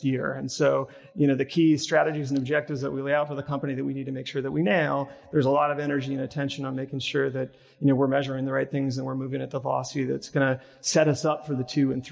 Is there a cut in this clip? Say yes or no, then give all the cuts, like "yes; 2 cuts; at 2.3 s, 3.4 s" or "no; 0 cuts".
no; 0 cuts